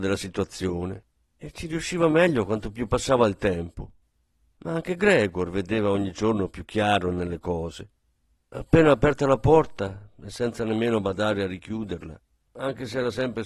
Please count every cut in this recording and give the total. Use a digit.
1